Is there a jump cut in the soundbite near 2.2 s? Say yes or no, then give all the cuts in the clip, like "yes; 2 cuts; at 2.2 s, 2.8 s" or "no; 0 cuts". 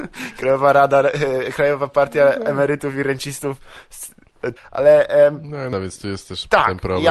no; 2 cuts; at 4.6 s, 5.7 s